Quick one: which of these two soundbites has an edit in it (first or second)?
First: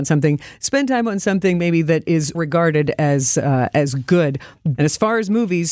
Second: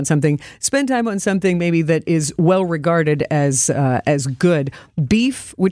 first